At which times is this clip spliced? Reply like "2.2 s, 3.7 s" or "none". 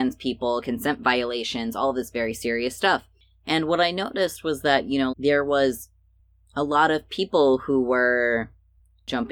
5.1 s